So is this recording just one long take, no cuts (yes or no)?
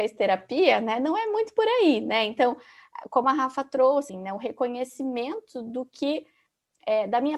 no